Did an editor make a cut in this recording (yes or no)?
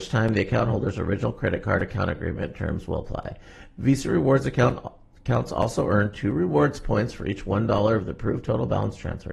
no